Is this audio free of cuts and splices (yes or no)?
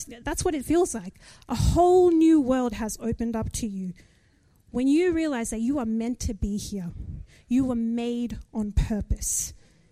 yes